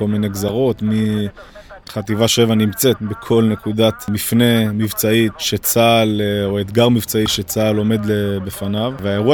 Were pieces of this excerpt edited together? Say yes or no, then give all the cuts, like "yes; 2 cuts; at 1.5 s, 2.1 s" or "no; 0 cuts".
yes; 1 cut; at 1.8 s